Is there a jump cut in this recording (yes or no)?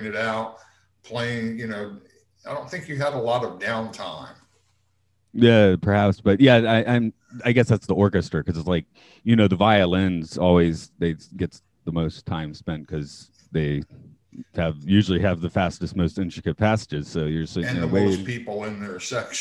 no